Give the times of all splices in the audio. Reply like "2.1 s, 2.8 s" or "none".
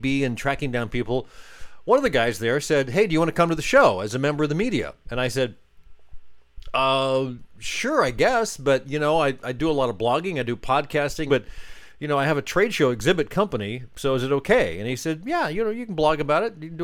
11.3 s